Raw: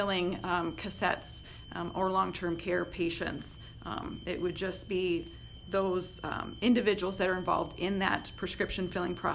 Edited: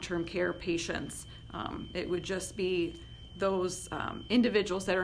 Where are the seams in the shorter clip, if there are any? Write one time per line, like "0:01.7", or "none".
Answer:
none